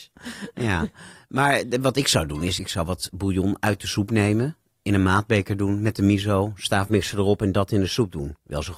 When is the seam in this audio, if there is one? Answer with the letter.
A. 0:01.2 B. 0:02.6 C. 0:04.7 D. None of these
D